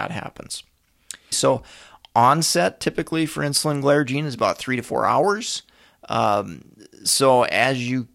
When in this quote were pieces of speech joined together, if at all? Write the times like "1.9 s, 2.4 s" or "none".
1.3 s